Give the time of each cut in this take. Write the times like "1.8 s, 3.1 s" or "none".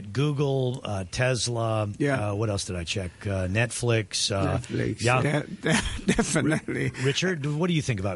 5.2 s